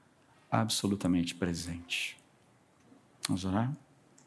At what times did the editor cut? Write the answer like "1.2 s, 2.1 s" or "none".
none